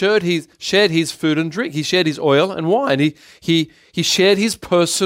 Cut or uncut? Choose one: uncut